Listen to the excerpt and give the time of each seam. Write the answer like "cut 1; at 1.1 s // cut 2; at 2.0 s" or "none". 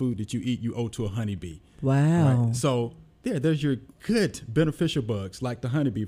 none